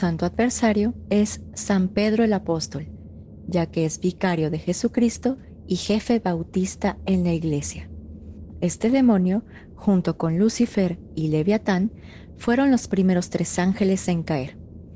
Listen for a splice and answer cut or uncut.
cut